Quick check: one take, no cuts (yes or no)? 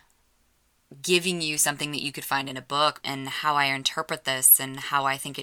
no